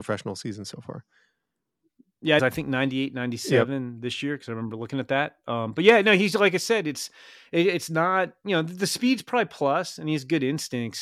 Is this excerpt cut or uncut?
cut